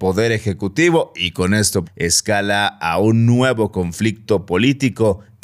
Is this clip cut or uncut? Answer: cut